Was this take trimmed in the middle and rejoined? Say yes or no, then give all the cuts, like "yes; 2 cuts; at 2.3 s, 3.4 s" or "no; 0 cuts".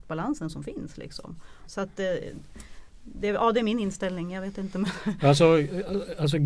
yes; 1 cut; at 1.7 s